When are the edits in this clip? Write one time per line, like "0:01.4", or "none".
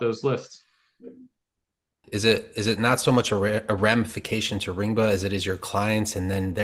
0:02.0